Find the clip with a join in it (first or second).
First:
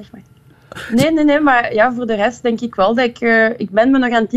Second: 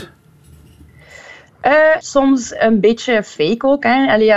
second